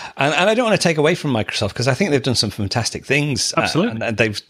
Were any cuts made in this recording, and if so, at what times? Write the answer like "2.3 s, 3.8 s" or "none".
none